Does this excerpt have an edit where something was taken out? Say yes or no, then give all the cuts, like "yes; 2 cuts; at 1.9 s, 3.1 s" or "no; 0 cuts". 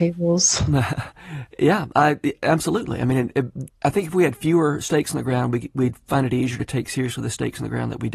yes; 1 cut; at 3.7 s